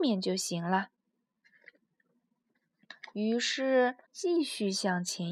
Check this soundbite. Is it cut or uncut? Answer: cut